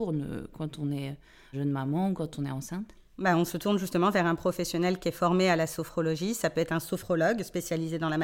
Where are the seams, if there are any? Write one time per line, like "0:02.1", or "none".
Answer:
0:01.5